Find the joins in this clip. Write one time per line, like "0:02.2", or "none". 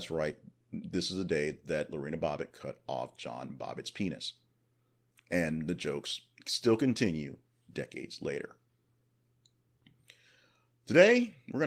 none